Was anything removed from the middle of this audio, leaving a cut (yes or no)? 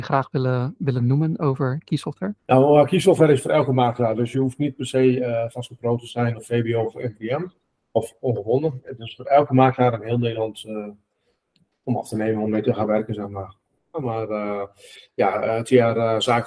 yes